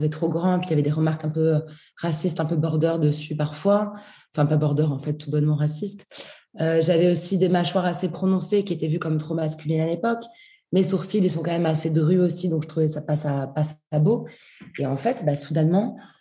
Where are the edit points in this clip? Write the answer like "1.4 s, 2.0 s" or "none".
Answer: none